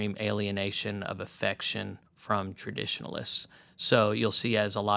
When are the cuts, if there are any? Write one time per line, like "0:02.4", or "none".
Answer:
0:02.1